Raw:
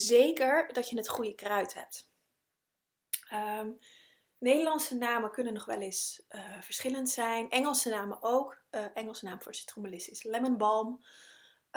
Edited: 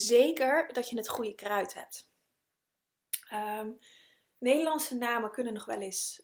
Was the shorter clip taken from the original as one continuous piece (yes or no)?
yes